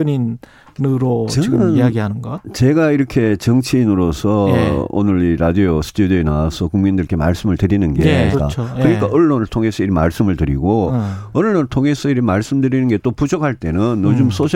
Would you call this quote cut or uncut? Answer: cut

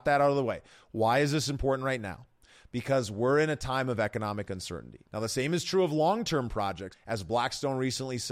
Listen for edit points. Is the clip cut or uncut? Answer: cut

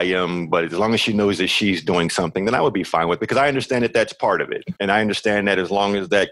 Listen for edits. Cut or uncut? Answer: cut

